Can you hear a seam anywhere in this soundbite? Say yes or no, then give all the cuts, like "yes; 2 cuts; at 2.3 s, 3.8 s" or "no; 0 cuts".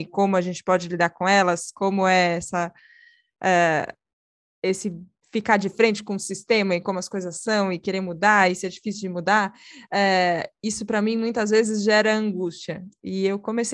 no; 0 cuts